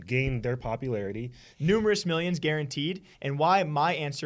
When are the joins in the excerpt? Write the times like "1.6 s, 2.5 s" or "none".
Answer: 1.5 s, 3.1 s